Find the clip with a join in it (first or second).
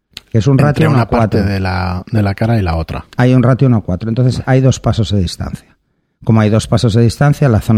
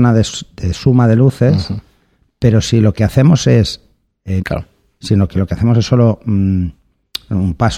second